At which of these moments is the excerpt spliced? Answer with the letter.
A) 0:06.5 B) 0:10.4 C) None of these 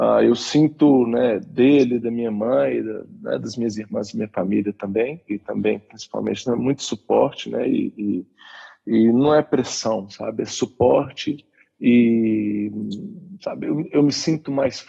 A